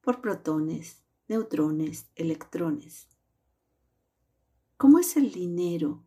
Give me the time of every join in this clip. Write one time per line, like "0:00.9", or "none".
none